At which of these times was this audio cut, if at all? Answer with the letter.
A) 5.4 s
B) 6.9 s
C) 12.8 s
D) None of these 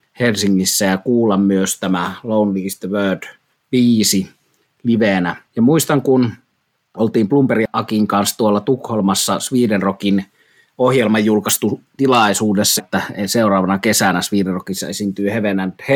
C